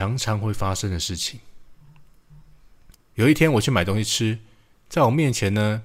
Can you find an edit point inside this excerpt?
no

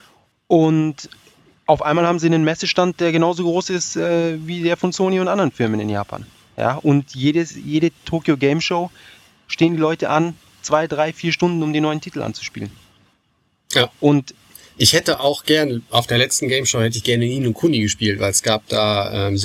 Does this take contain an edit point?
no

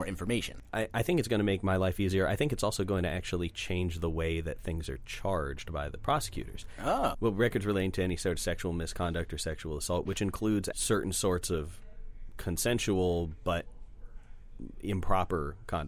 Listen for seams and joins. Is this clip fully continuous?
no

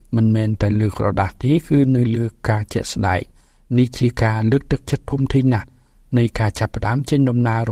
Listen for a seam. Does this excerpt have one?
no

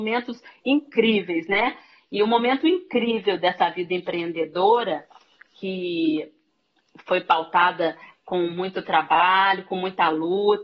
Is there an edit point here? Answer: no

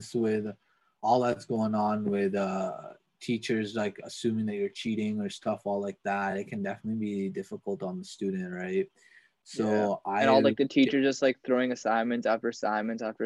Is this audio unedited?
yes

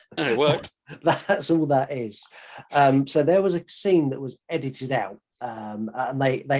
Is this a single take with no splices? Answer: no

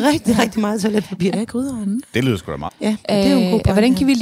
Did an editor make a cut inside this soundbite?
yes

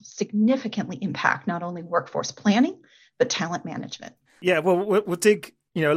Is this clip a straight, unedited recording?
no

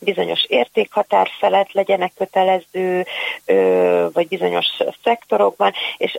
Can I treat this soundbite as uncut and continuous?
no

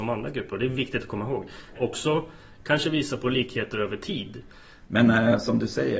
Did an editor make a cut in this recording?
yes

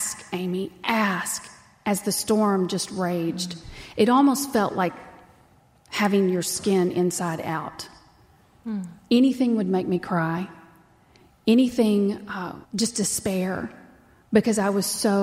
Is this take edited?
yes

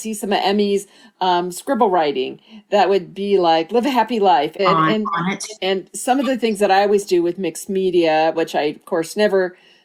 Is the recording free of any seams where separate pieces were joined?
no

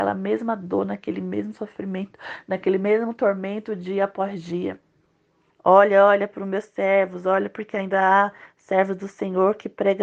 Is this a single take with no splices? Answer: no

